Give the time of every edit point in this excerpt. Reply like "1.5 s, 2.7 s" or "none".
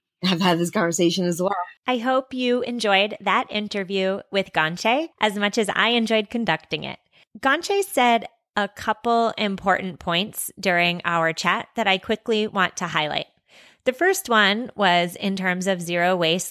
1.8 s

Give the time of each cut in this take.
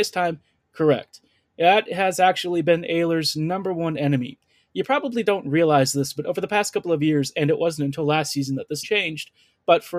8.8 s

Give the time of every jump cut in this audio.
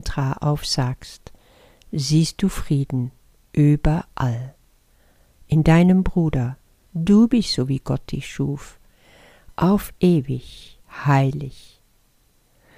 6.9 s

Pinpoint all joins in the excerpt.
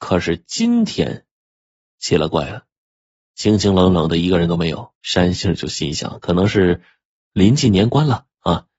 4.9 s

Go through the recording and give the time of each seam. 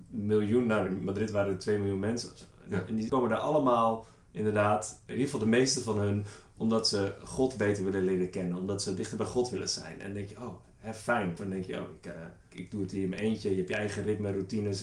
11.4 s

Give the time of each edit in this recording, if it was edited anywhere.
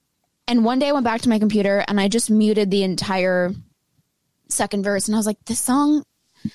none

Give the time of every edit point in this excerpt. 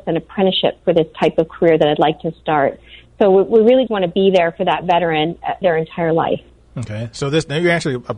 3.9 s, 5.6 s

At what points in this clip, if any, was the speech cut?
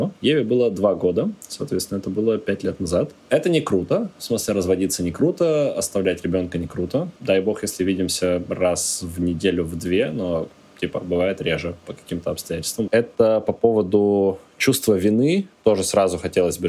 7.2 s, 12.9 s

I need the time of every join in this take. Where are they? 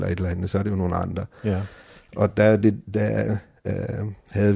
none

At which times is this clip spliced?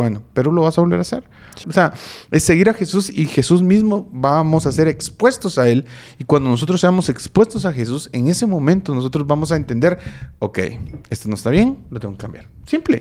1.6 s

